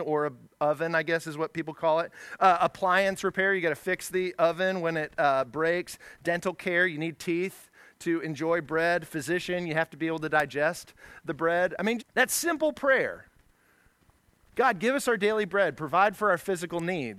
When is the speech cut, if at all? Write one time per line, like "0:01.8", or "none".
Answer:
0:12.0

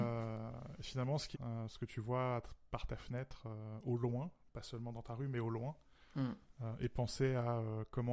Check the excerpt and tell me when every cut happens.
0:01.3

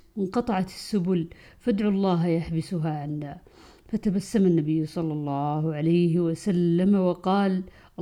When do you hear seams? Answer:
none

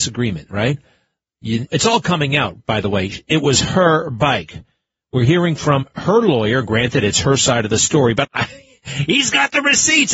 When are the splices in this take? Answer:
0:01.7
0:08.2

